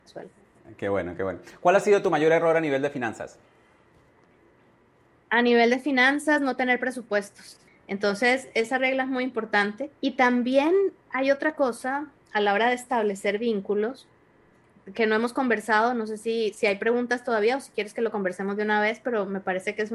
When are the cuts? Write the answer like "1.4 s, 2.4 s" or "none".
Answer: 7.7 s, 10.0 s